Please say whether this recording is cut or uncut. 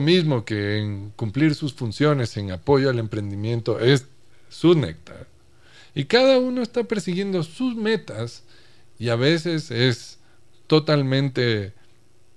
uncut